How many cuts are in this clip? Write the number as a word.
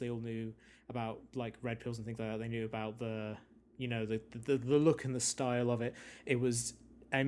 zero